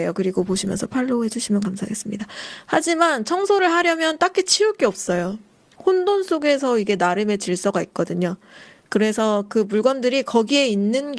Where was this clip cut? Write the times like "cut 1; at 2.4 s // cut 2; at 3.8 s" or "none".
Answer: none